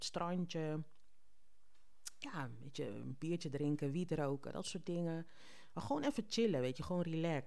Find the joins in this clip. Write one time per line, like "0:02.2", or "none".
none